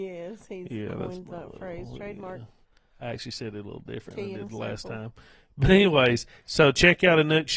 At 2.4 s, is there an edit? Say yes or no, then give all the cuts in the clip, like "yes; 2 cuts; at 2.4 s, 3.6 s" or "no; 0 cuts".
no; 0 cuts